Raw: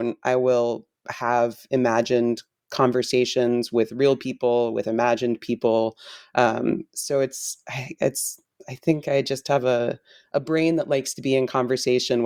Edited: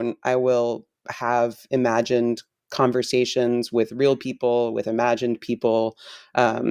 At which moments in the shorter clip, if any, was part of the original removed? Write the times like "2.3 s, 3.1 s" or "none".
none